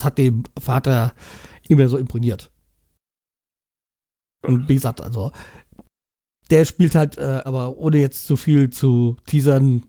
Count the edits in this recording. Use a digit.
1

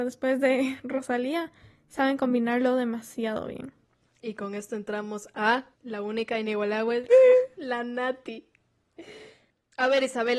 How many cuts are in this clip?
2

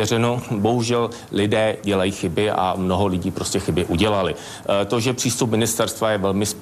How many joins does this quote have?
0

